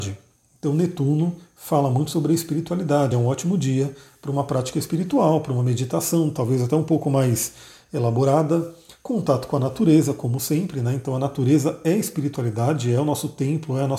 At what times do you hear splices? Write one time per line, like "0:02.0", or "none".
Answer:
none